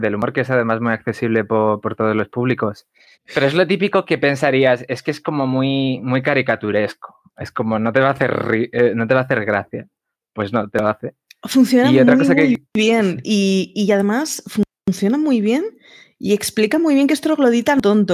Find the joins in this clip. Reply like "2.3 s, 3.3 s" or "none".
3.1 s